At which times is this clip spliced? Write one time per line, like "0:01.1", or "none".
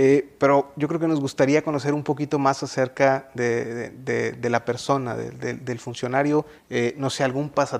0:06.6